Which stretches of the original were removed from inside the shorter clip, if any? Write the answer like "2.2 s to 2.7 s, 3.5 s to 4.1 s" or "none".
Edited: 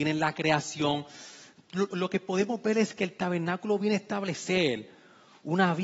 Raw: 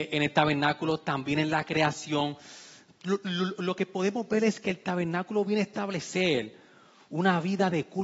3.2 s to 3.6 s

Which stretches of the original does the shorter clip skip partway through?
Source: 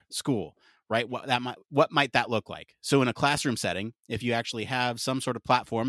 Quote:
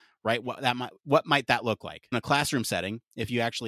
2.8 s to 3.0 s

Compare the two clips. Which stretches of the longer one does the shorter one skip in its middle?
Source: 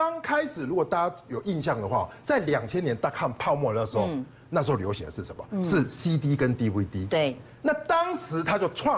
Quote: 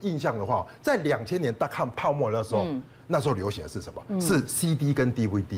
none

